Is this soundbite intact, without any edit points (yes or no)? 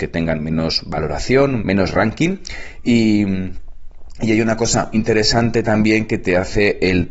no